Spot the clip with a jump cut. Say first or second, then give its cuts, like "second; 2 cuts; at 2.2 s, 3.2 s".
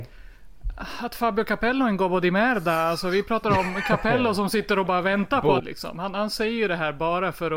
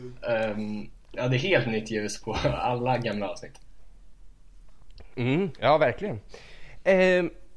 first; 1 cut; at 5.6 s